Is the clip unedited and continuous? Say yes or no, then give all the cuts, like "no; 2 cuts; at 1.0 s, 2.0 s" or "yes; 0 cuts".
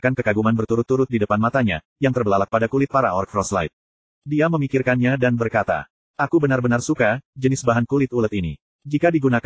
yes; 0 cuts